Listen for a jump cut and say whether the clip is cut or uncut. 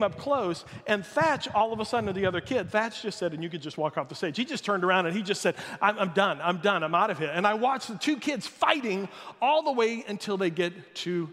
uncut